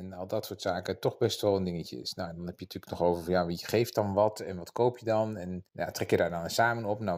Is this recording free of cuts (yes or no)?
no